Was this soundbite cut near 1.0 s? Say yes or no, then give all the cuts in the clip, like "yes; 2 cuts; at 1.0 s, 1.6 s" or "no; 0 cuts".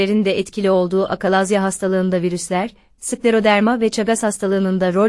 no; 1 cut; at 3.0 s